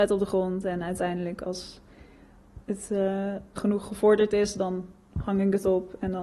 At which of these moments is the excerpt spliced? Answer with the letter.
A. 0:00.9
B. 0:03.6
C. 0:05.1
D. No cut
B